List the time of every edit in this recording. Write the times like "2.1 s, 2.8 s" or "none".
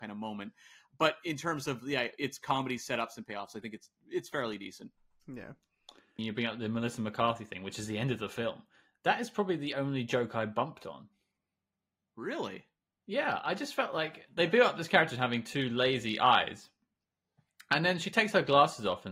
6.2 s